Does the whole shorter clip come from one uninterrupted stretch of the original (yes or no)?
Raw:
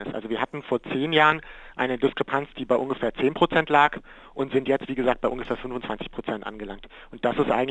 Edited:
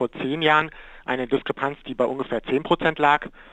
yes